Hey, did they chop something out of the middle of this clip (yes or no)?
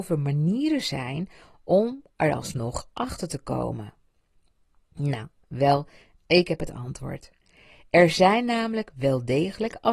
no